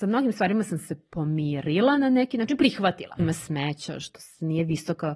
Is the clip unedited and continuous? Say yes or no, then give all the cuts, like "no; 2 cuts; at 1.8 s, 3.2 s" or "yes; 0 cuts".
no; 1 cut; at 3.2 s